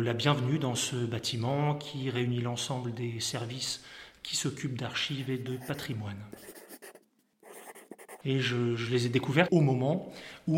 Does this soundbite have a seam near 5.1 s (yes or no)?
no